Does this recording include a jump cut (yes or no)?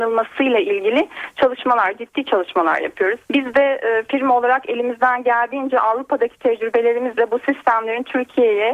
yes